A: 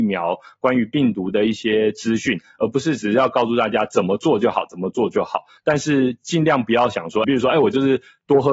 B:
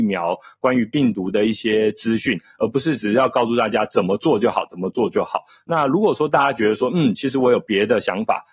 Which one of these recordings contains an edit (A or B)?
A